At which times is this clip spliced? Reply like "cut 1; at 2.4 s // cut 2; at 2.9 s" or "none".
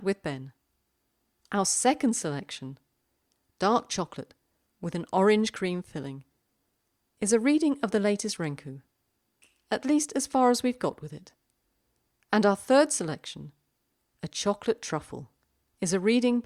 none